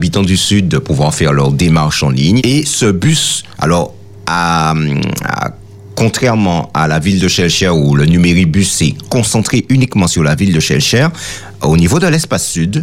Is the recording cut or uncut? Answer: cut